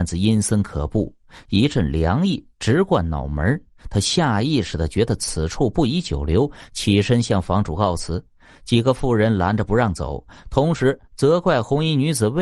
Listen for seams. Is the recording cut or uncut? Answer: uncut